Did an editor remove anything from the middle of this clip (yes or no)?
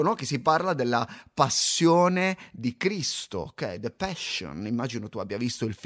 no